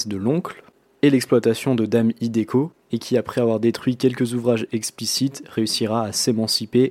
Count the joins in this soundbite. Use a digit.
0